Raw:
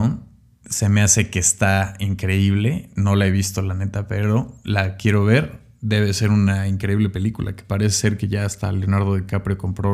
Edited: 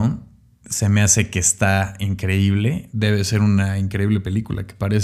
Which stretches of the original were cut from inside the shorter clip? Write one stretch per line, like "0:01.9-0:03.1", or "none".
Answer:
0:02.9-0:05.8